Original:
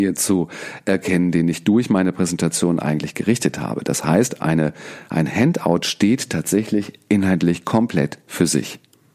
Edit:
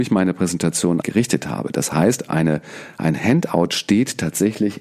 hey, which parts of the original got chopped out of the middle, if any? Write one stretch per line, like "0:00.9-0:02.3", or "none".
0:02.8-0:03.1